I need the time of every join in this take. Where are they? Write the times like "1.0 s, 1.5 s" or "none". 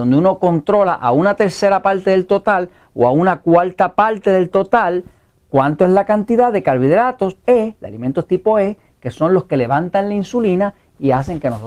7.4 s